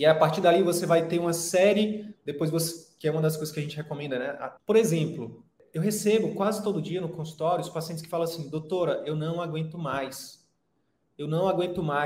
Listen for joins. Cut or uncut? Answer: cut